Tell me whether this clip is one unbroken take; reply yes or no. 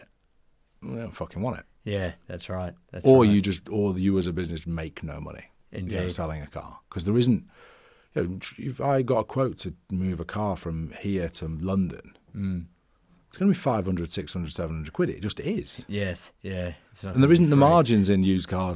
yes